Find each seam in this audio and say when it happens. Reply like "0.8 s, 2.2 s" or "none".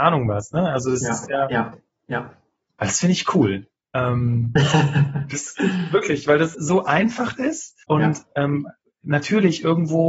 6.5 s, 7.8 s